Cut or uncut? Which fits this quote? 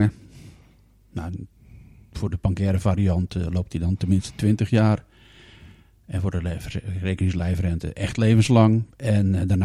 uncut